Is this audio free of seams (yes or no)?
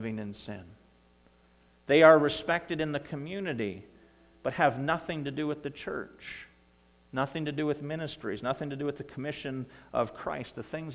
yes